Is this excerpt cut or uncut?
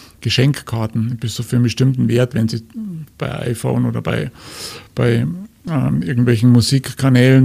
uncut